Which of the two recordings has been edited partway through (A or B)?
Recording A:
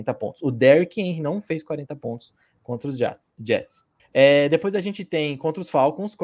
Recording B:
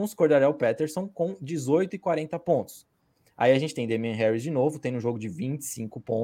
A